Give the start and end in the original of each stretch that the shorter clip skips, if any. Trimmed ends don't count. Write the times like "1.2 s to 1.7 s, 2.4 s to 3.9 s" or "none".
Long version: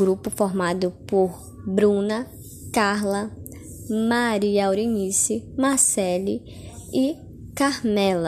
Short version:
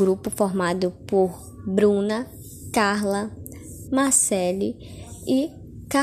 3.8 s to 5.5 s